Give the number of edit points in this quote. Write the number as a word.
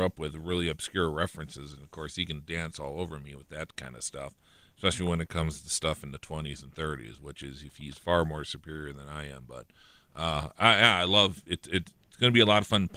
zero